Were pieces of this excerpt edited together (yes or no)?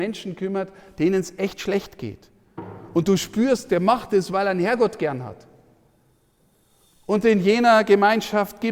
no